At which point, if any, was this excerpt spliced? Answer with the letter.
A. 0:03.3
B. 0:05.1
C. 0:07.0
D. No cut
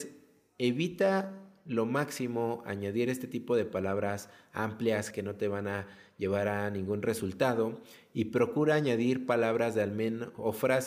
B